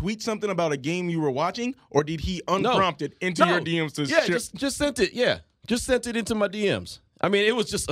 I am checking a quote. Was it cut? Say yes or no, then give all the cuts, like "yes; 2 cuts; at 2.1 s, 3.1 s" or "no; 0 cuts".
no; 0 cuts